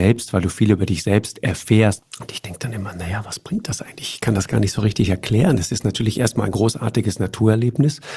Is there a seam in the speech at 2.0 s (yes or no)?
yes